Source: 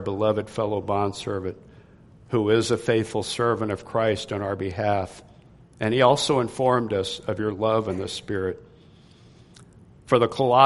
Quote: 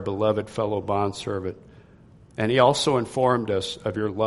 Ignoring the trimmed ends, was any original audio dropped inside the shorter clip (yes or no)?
yes